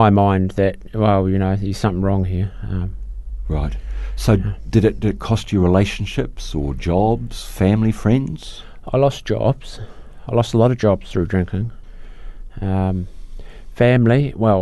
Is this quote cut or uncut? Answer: uncut